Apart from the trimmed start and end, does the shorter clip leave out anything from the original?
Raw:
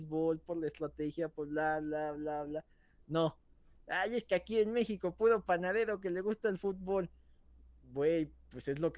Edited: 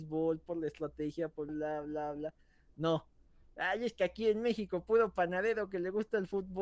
yes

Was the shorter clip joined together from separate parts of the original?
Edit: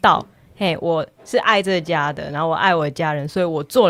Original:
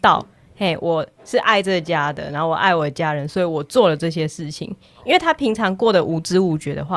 no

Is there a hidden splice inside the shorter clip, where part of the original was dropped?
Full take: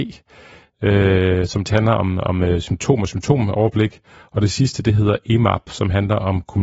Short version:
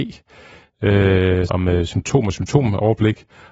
yes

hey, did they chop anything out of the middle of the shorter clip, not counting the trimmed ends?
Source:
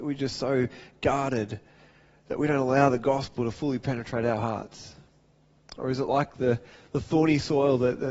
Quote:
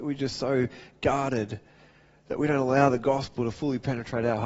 no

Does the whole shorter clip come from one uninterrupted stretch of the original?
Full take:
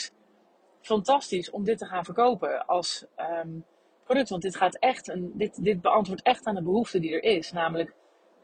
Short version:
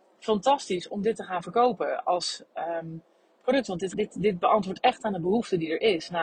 no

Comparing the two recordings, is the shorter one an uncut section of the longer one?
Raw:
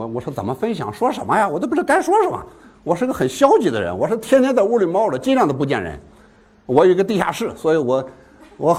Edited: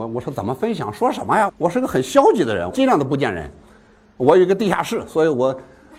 no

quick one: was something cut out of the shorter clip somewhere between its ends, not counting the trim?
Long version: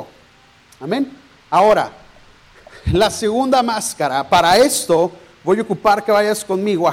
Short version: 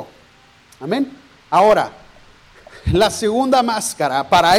no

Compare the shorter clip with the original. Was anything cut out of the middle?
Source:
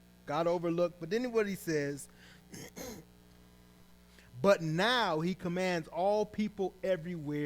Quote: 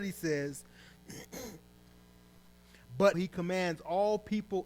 yes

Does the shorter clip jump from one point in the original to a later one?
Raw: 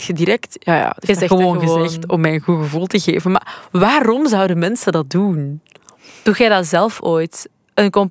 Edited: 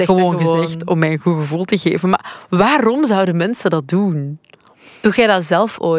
no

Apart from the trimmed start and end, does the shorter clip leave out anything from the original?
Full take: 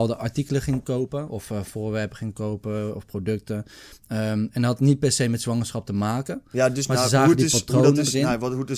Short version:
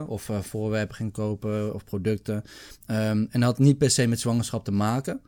no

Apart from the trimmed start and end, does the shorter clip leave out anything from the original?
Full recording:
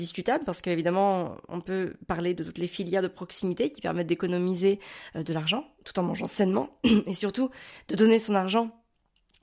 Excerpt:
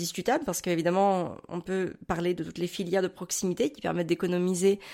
no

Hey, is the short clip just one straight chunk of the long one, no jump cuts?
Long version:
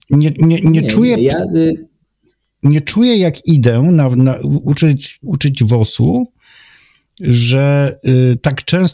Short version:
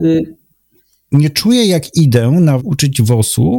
no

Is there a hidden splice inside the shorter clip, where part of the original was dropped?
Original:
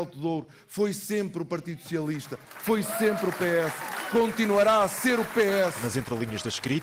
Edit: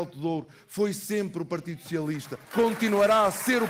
yes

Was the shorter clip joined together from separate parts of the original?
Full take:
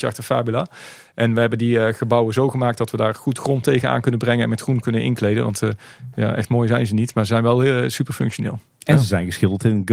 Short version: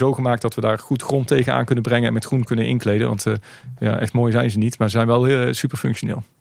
no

